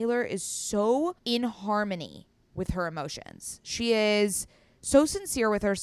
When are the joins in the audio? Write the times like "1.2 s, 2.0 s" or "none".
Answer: 1.2 s